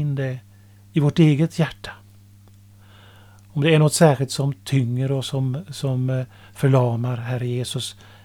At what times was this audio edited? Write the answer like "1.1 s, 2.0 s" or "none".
none

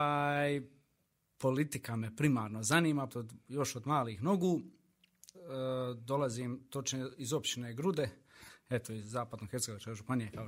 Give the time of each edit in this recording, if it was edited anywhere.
3.1 s, 5.3 s

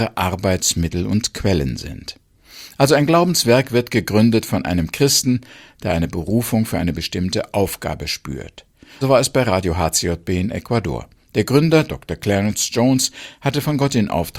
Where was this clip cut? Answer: 9.0 s

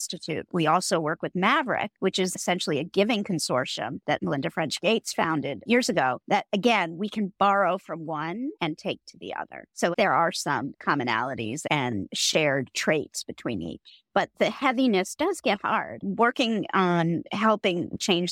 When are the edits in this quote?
9.9 s

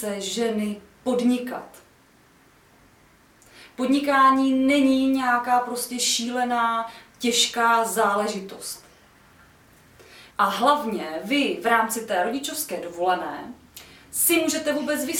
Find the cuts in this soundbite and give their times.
10.3 s

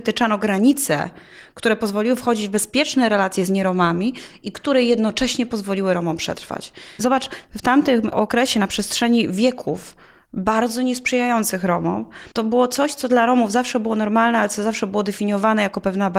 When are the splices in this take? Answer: 7.0 s, 12.3 s

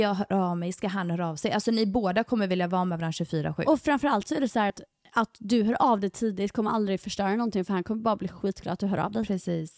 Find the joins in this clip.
none

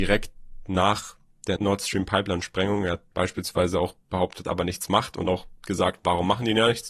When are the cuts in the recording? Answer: 1.6 s, 4.4 s, 5.6 s

